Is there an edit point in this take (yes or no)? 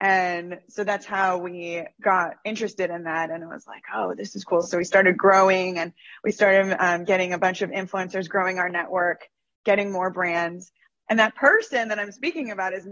no